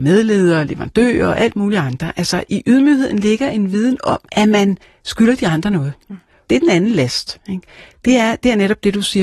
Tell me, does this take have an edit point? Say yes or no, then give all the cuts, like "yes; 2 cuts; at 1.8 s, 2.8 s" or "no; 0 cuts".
yes; 2 cuts; at 4.3 s, 6.5 s